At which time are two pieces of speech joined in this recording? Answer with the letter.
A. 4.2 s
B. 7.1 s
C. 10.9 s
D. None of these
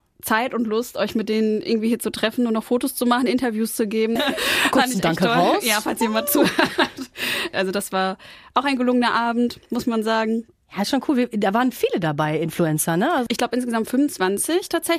A